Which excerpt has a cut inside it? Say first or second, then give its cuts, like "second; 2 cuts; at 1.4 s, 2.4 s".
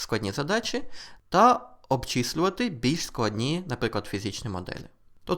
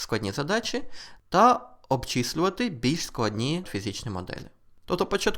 second; 1 cut; at 3.6 s